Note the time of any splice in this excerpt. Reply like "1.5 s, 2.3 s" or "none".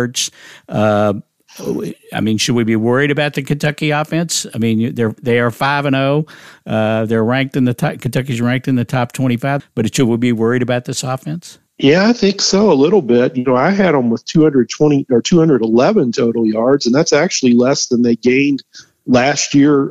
9.6 s, 11.7 s